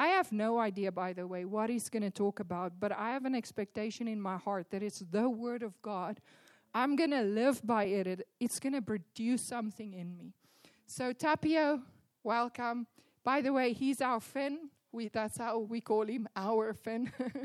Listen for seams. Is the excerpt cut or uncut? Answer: uncut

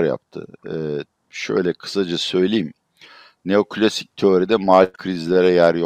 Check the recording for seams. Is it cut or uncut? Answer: uncut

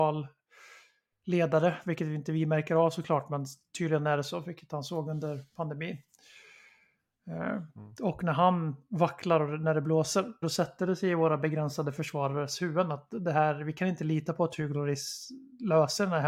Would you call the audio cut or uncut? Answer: cut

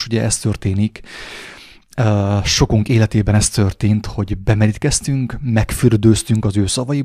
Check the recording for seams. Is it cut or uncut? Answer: uncut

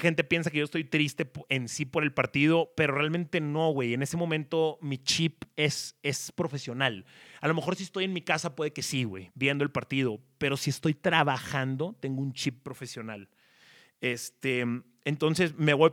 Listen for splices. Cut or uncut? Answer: cut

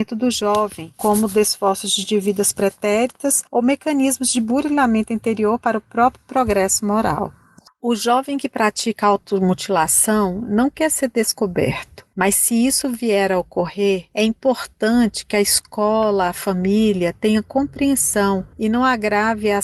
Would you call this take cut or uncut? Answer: uncut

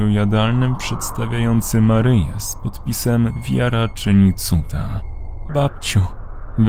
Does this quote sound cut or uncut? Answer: cut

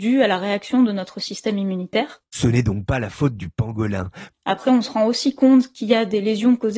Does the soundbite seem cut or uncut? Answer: cut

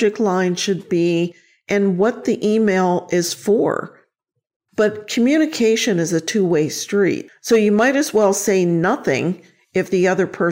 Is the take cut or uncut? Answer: cut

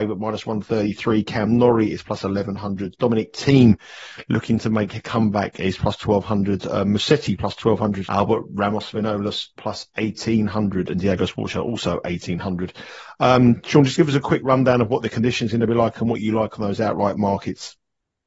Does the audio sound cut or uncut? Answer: cut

